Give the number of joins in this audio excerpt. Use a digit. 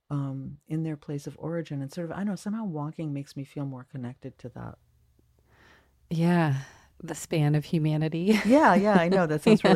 0